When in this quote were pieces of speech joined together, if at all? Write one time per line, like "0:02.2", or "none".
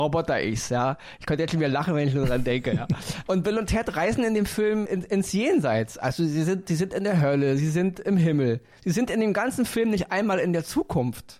0:04.9